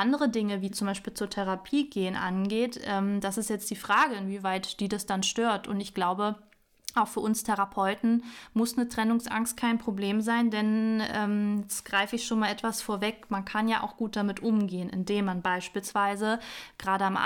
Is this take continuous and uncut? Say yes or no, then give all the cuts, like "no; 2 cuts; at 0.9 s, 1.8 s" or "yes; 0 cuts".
yes; 0 cuts